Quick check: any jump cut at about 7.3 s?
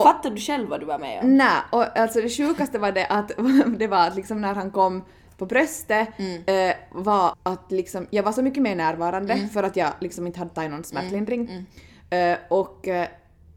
yes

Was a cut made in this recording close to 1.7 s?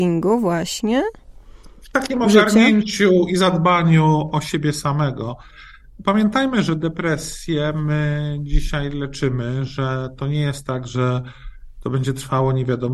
no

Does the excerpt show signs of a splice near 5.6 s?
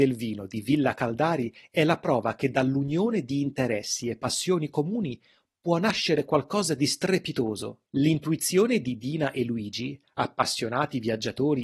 no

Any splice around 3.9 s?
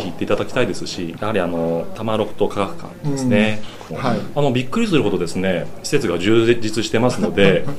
yes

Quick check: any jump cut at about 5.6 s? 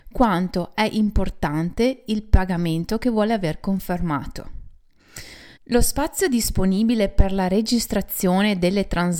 yes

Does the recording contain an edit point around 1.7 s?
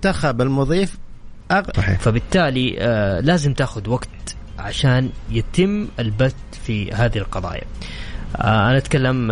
yes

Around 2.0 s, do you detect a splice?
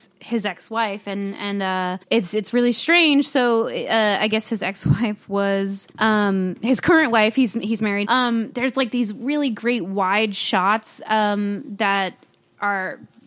yes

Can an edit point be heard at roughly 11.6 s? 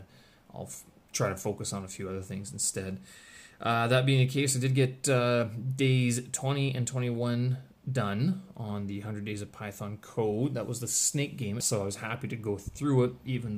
yes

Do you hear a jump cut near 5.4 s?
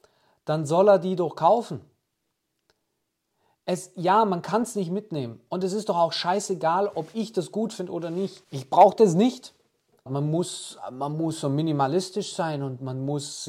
no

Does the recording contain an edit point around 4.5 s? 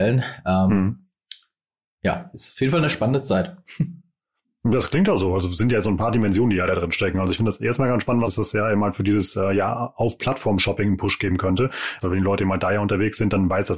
no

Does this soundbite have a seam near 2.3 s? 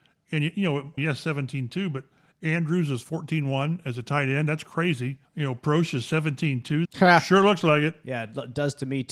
no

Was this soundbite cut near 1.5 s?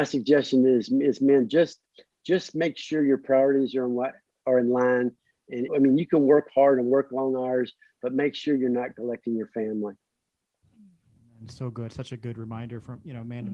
no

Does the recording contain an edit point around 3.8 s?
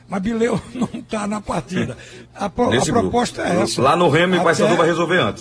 no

